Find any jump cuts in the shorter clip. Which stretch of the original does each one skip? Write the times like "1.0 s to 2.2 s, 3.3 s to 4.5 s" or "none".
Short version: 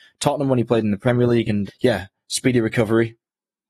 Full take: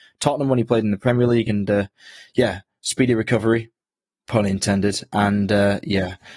1.7 s to 2.2 s